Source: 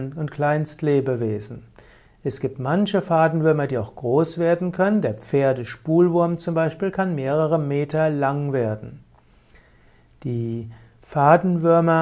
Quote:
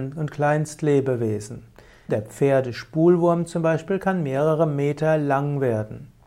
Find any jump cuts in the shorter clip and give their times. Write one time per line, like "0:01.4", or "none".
0:02.1